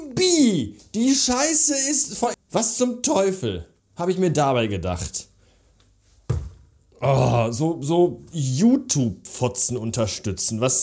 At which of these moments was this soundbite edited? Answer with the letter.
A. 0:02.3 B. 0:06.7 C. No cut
A